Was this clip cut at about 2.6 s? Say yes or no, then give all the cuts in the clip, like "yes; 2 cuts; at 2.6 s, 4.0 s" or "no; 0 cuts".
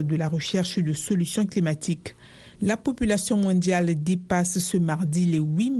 yes; 1 cut; at 2.6 s